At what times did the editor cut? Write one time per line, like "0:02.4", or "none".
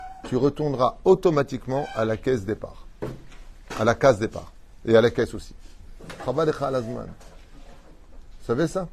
none